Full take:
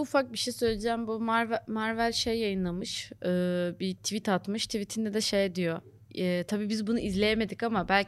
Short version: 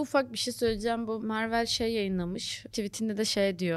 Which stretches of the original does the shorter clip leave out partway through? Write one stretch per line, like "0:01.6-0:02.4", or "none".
0:01.2-0:01.6
0:03.2-0:04.7